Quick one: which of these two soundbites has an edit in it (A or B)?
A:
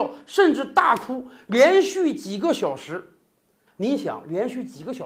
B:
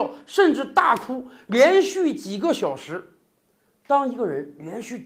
A